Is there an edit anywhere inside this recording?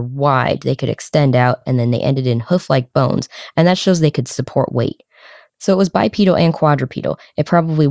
no; 0 cuts

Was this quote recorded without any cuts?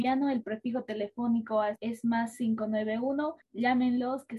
yes; 0 cuts

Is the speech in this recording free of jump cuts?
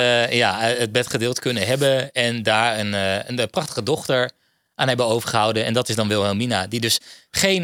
yes; 0 cuts

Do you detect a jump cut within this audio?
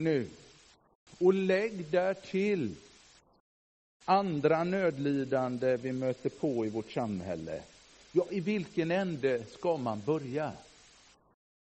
yes; 1 cut; at 1.1 s

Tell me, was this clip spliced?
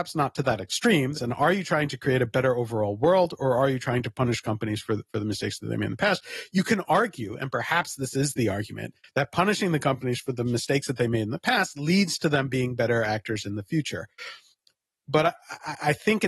yes; 1 cut; at 1.1 s

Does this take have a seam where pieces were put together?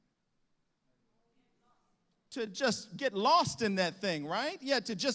no; 0 cuts

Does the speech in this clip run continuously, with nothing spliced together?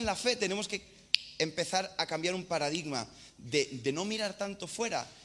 yes; 0 cuts

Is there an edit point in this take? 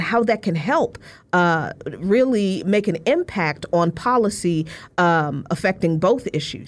no; 0 cuts

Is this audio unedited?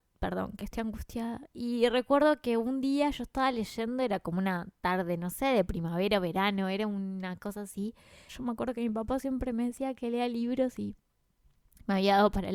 no; 1 cut; at 8.3 s

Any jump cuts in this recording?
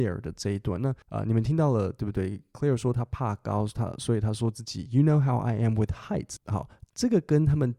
yes; 2 cuts; at 1.0 s, 6.4 s

